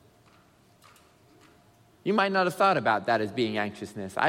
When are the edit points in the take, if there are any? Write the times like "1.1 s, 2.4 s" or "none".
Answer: none